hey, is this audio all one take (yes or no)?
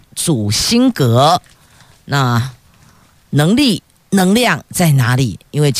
yes